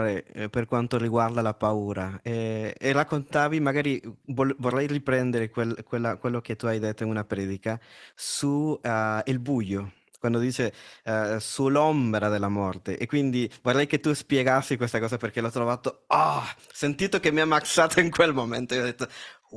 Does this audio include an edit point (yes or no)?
no